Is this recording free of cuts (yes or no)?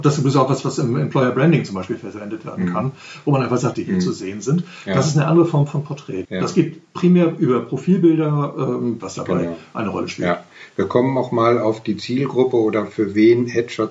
no